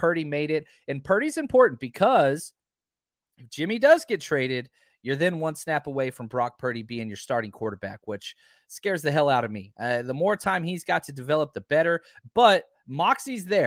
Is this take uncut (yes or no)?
yes